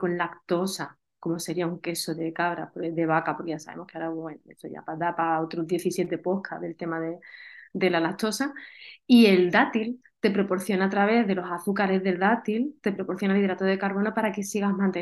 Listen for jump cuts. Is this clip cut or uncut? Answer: uncut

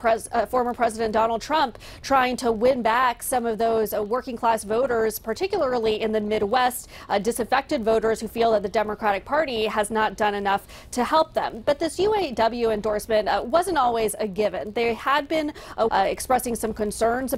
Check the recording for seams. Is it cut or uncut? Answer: cut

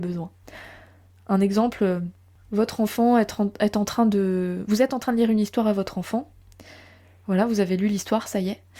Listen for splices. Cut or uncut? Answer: uncut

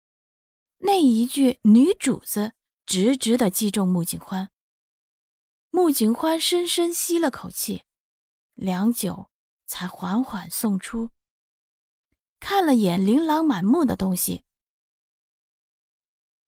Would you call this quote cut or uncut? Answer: uncut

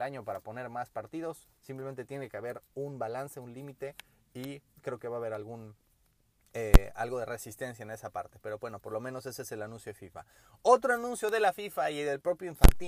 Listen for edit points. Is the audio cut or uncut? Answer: uncut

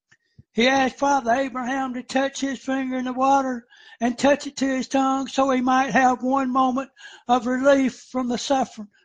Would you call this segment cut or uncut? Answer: uncut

